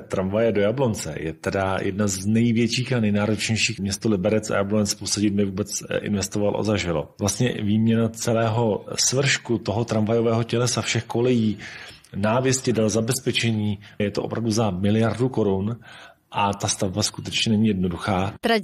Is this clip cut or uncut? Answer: cut